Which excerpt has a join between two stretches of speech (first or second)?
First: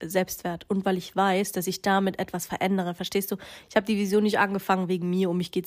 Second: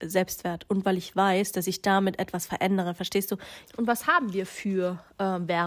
second